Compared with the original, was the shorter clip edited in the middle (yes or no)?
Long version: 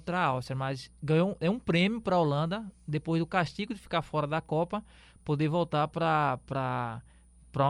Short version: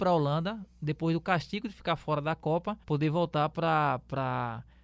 yes